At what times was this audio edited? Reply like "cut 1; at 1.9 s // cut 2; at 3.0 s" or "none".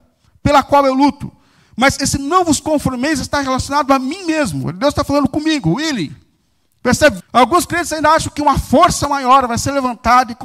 cut 1; at 7.2 s